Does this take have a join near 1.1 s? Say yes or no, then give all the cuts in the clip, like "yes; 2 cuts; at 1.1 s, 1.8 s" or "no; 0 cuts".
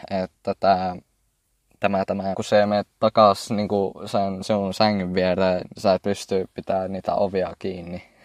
no; 2 cuts; at 2.3 s, 5.8 s